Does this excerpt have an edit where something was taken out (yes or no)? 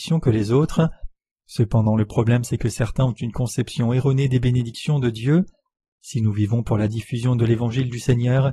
no